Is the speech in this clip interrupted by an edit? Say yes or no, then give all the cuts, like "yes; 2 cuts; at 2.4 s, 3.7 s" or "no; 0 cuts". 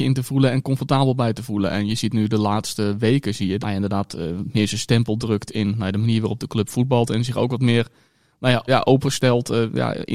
yes; 2 cuts; at 3.6 s, 8.7 s